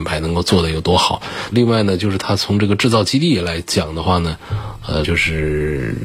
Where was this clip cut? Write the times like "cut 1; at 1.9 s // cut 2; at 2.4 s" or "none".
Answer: cut 1; at 1.5 s // cut 2; at 5.0 s